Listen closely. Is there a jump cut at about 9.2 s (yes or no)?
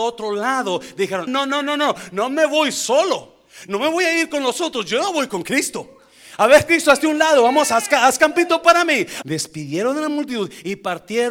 yes